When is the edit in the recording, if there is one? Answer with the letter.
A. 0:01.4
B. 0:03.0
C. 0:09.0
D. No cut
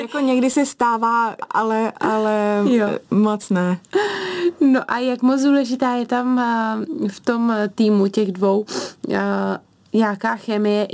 A